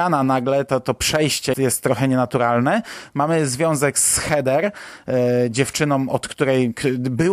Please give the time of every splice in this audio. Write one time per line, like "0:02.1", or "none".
0:01.5